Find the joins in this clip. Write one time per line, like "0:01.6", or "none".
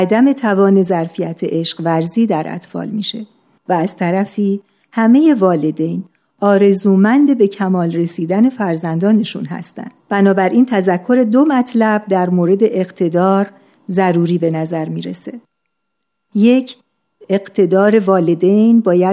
0:03.6